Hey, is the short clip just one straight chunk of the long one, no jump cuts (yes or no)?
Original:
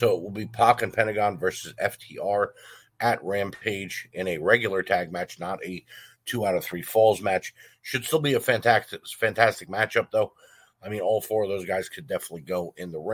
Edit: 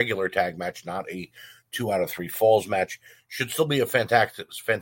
yes